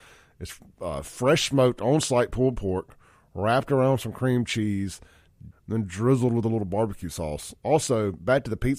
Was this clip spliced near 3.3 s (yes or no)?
no